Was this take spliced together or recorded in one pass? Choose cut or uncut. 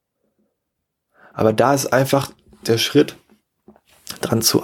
uncut